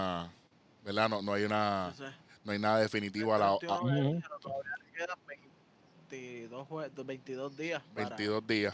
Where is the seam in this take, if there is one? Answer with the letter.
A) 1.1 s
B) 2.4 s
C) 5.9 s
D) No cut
D